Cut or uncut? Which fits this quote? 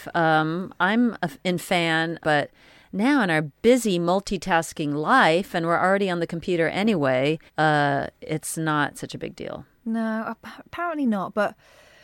cut